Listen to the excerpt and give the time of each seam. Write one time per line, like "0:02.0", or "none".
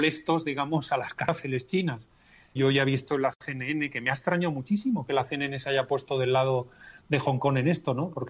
0:02.6